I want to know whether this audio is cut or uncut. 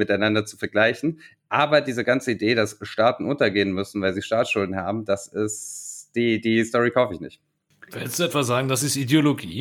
uncut